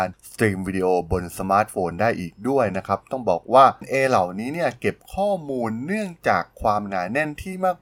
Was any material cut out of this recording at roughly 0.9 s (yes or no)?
no